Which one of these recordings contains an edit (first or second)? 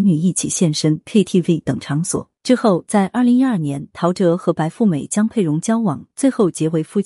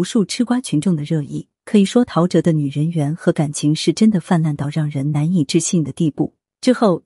first